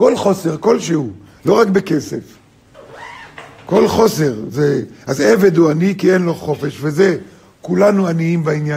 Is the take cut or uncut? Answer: uncut